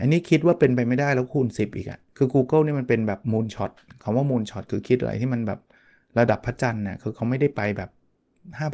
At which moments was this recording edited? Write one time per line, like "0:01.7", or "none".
0:02.1

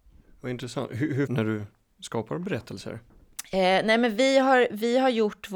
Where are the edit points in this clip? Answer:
0:01.3

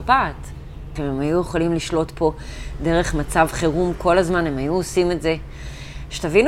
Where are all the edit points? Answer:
0:01.0

